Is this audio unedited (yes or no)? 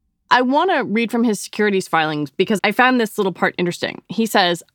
no